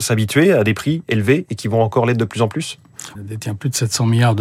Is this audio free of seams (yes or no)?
no